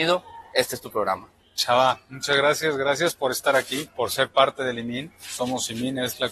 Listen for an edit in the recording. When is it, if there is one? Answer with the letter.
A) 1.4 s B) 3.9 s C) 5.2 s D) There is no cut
B